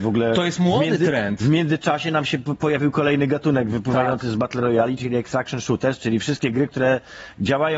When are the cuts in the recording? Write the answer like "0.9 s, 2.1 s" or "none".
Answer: none